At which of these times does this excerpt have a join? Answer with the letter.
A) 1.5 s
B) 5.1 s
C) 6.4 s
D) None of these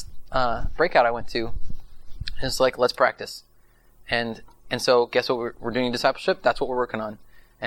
D